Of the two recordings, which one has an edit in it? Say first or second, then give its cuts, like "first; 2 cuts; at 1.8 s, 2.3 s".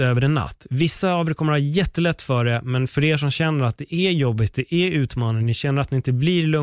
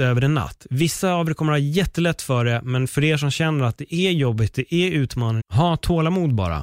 second; 1 cut; at 5.4 s